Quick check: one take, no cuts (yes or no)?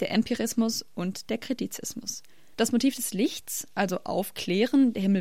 no